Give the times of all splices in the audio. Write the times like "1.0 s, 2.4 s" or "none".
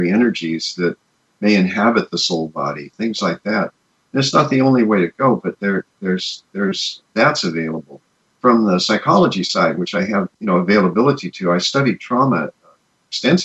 7.0 s, 10.3 s